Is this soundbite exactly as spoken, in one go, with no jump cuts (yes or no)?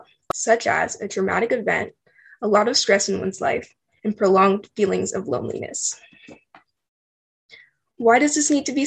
yes